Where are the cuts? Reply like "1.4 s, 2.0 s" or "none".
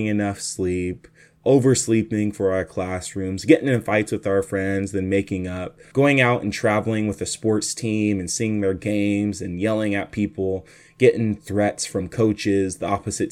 5.9 s